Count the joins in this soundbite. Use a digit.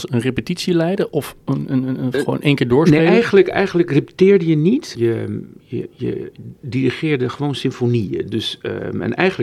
1